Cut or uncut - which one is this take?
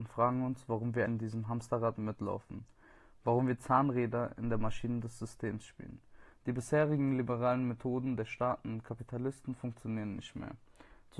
cut